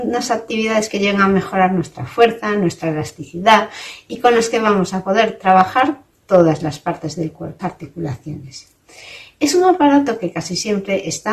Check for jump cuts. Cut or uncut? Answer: cut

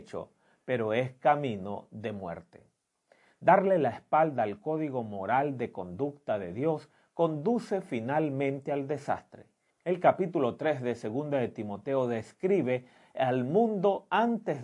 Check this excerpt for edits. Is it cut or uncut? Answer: cut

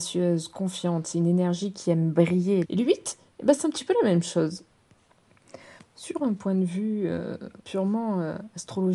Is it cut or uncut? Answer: cut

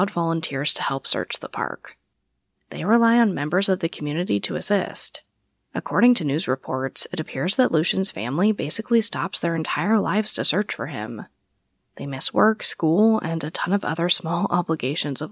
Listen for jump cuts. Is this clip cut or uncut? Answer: cut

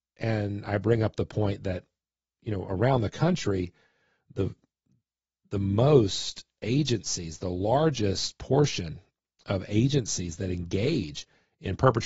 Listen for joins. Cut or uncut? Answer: uncut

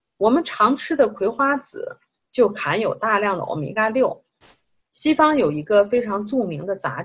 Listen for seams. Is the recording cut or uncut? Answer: cut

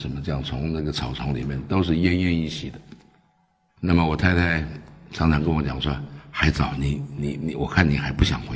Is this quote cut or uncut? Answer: cut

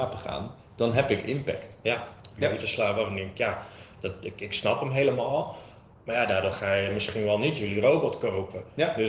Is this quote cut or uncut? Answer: cut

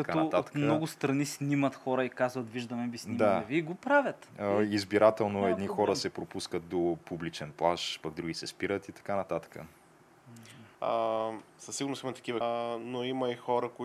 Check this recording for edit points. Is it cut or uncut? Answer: cut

